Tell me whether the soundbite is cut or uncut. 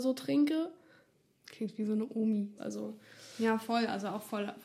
cut